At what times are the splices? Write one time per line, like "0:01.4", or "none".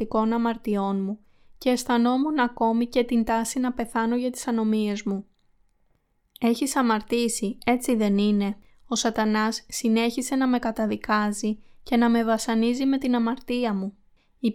none